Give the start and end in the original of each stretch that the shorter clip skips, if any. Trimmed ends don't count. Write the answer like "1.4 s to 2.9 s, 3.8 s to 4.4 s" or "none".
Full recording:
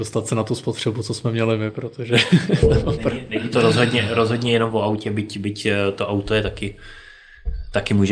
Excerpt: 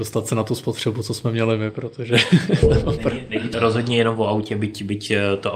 3.5 s to 4.1 s